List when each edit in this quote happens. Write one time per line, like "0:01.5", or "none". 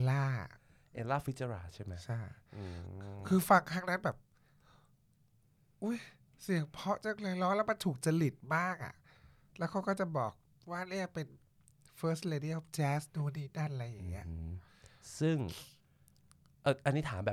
none